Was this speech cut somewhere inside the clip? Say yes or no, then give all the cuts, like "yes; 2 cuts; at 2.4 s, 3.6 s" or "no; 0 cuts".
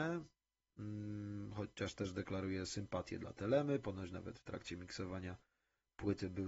no; 0 cuts